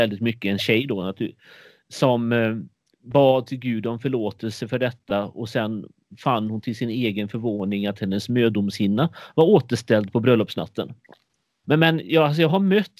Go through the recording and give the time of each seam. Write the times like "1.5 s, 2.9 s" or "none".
11.6 s